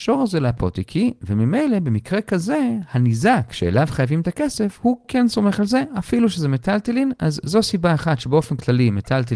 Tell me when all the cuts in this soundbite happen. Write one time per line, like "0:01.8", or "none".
none